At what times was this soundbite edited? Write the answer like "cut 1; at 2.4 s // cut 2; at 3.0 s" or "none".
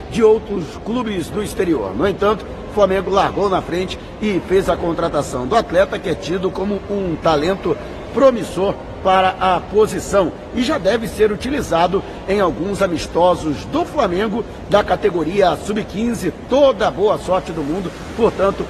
none